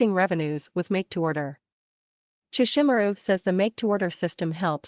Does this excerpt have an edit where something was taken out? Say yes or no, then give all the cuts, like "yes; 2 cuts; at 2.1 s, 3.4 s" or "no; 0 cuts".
no; 0 cuts